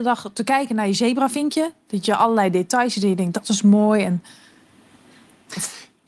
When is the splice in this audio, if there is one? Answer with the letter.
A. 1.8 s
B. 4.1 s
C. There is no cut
C